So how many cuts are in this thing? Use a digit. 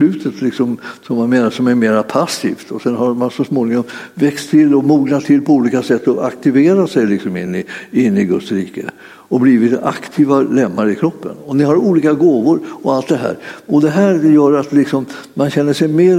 0